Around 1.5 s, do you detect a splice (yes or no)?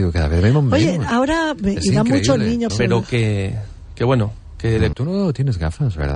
no